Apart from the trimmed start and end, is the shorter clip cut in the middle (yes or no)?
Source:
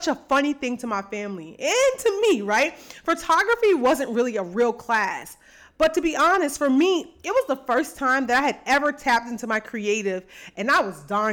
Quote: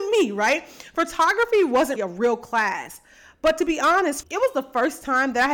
yes